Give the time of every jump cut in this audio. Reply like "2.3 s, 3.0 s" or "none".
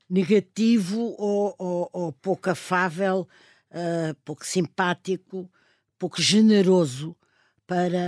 none